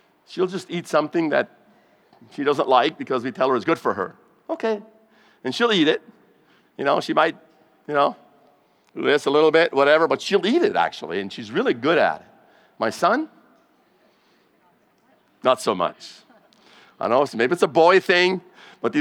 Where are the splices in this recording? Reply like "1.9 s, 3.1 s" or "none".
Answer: none